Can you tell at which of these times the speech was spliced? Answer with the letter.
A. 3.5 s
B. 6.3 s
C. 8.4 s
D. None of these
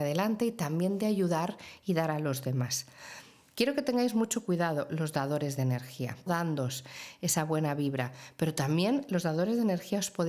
B